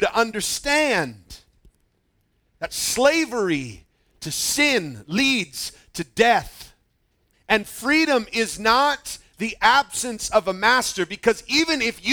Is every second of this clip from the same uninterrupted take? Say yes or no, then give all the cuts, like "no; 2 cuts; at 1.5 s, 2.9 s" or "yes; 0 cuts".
no; 1 cut; at 7.3 s